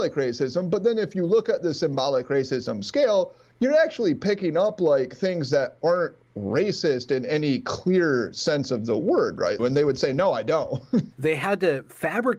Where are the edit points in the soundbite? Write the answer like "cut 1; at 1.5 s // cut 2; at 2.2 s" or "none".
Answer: cut 1; at 9.6 s // cut 2; at 11.1 s